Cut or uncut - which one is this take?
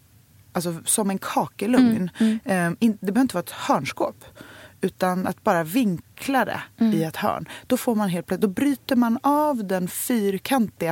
uncut